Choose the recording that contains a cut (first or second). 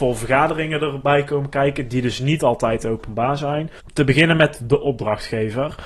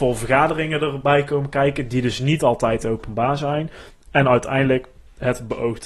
first